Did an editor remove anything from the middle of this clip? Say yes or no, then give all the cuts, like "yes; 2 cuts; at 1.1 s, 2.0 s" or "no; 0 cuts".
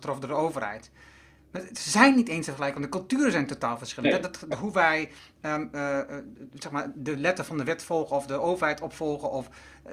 yes; 1 cut; at 4.5 s